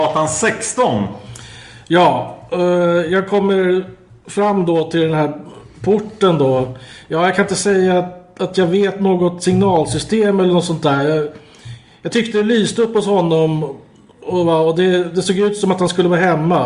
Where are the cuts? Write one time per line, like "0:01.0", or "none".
none